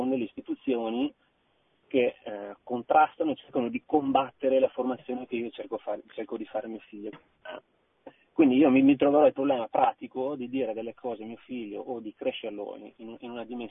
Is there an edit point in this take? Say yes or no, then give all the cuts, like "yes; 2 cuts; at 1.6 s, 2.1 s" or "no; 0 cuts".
yes; 1 cut; at 7.1 s